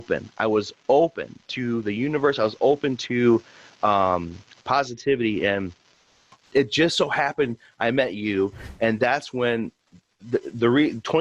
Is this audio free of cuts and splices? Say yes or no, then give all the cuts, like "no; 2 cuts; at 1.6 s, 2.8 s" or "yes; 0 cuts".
yes; 0 cuts